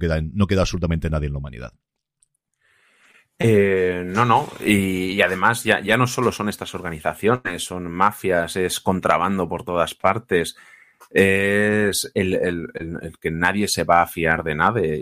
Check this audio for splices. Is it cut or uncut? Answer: uncut